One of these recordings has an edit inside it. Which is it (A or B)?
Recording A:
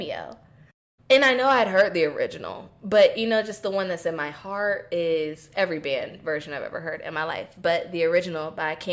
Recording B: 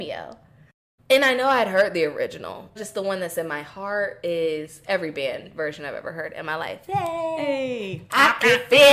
B